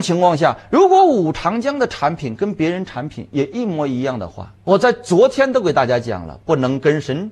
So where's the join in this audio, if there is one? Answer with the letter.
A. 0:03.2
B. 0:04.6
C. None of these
B